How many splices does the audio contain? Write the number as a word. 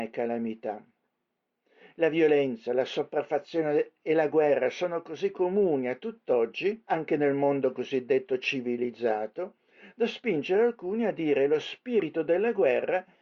one